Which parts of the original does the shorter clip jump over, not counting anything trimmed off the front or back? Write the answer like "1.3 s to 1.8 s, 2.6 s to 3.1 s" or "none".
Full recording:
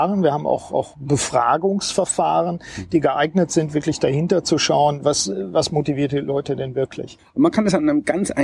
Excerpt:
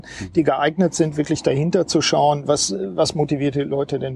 none

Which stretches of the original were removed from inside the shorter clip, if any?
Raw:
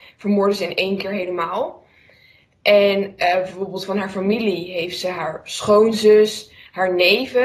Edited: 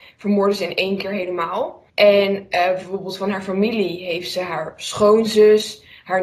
1.9 s to 2.6 s

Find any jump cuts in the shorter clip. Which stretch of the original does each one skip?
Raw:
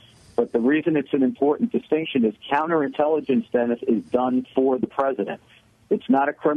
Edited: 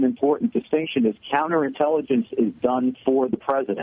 3.5 s to 3.8 s

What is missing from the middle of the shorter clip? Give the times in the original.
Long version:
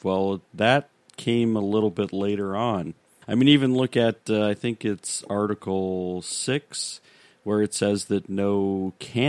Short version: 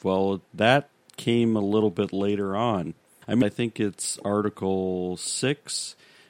3.4 s to 4.5 s

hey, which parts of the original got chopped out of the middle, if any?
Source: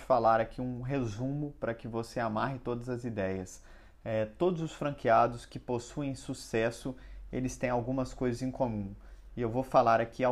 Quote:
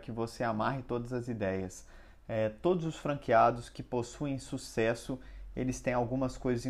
none

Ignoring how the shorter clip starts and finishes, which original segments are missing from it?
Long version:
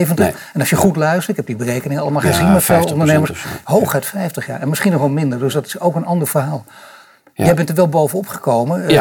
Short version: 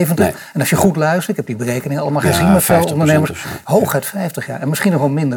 none

